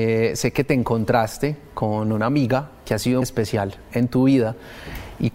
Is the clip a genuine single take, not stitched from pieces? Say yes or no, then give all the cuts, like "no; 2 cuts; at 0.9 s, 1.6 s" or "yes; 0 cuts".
no; 1 cut; at 3.2 s